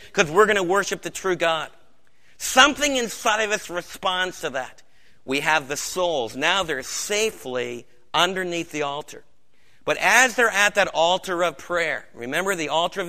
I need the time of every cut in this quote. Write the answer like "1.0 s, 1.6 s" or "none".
5.1 s